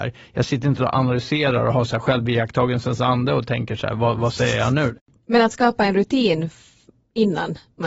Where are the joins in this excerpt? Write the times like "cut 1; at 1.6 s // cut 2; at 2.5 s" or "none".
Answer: none

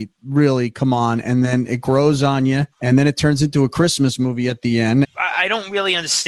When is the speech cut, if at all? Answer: cut 1; at 2.7 s // cut 2; at 5.0 s

